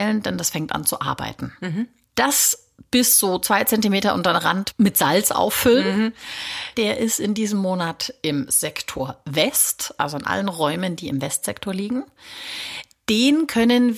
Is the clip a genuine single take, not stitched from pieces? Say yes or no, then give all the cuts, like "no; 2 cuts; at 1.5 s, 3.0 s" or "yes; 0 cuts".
no; 2 cuts; at 2.1 s, 6.7 s